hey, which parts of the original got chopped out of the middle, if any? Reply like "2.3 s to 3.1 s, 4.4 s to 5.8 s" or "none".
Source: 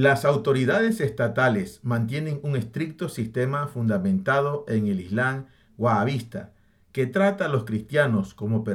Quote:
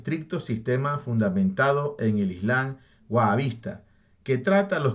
none